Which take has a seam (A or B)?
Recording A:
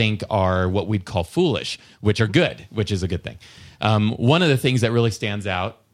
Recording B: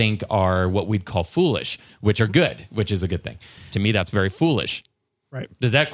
B